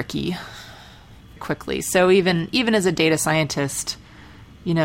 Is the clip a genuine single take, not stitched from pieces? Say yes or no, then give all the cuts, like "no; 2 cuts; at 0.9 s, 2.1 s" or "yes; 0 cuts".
no; 1 cut; at 1.4 s